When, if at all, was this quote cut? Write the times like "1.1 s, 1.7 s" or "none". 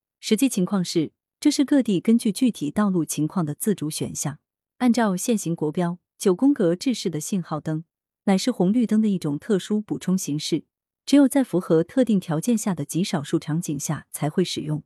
1.3 s, 4.6 s

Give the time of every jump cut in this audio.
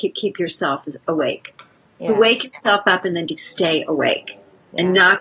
none

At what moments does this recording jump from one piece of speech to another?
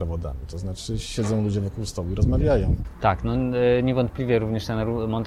none

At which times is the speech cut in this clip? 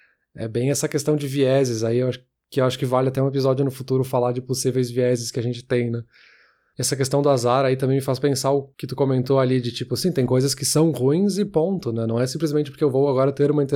none

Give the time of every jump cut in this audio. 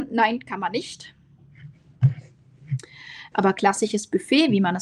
3.3 s

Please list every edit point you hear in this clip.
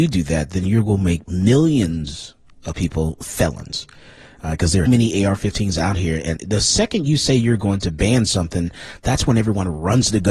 4.9 s, 6.4 s

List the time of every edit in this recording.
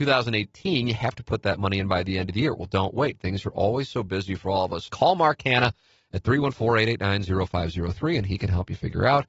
4.9 s

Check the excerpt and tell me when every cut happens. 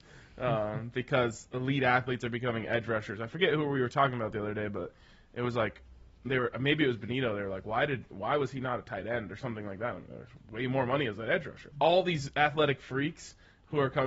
11.7 s

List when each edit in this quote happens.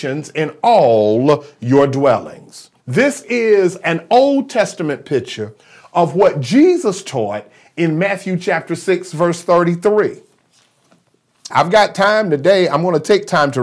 2.8 s, 11.5 s

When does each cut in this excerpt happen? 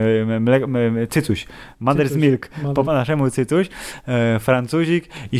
2.8 s

